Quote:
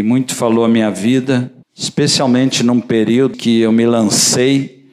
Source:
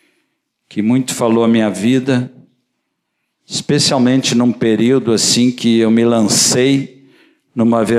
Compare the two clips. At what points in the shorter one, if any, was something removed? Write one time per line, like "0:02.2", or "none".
0:01.6
0:03.3